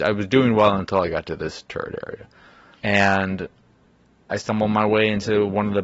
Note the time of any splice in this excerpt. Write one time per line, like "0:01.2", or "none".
0:02.8